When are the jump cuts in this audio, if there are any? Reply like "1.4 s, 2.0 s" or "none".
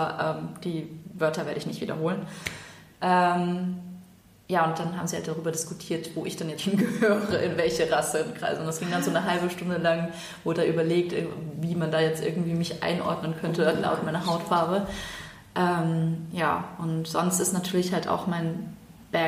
6.6 s